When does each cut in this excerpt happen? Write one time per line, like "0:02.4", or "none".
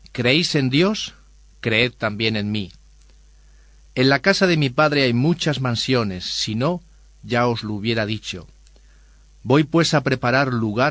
none